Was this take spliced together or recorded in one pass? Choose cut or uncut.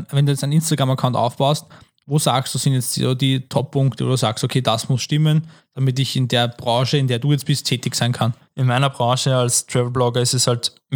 uncut